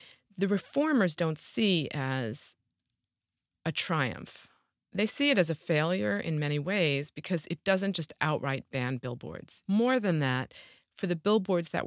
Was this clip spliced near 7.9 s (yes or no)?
no